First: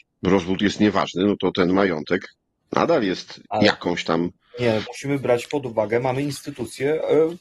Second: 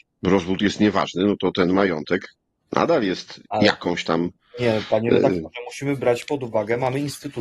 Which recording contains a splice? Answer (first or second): first